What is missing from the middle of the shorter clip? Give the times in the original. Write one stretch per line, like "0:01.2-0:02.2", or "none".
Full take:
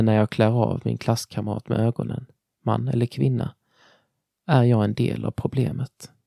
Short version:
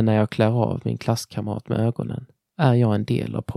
0:02.5-0:04.4

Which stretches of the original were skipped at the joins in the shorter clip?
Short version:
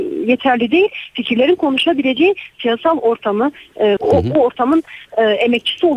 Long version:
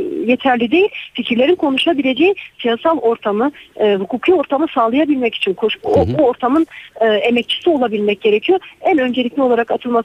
0:04.0-0:05.8

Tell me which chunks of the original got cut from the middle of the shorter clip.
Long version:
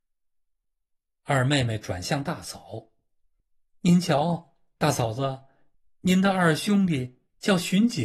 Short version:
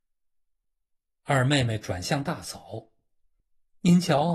none

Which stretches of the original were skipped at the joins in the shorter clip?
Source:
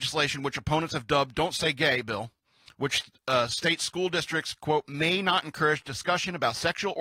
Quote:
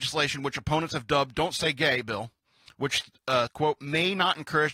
0:03.5-0:04.5

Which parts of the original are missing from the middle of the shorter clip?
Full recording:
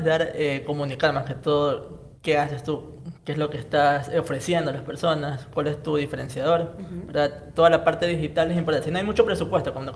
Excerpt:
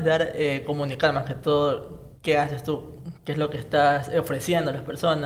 none

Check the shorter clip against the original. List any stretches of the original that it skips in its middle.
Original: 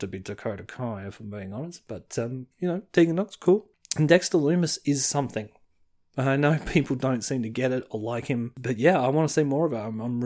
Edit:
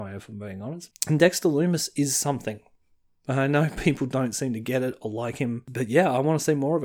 0:01.8-0:03.8

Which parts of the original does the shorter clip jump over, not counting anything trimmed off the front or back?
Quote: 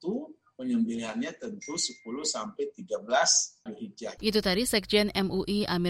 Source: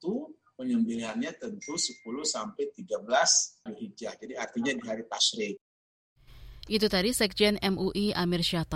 0:04.2-0:06.6

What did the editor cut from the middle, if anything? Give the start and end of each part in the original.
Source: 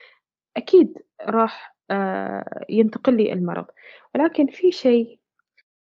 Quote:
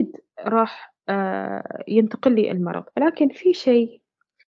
0:03.7-0:04.1

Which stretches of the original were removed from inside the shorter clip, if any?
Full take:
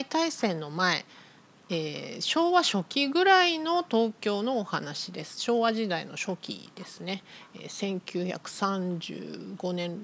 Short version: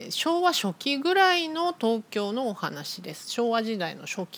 none

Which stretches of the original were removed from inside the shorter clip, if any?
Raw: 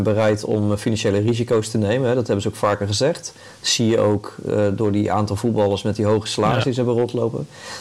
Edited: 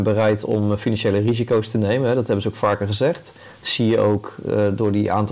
none

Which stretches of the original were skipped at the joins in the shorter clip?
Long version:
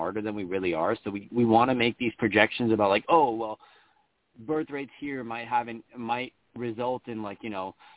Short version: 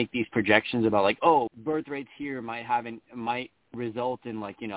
0:03.3-0:04.3

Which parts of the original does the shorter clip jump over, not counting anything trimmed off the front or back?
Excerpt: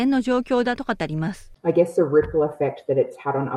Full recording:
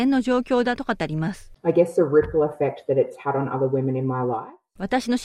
none

